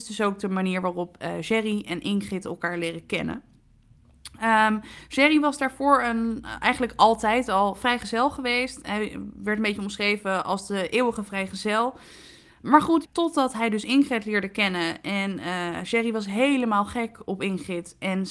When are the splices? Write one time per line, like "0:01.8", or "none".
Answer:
0:13.0